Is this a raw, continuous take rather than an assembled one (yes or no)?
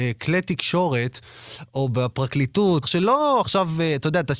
no